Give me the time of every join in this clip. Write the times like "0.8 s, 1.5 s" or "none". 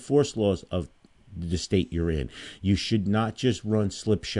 none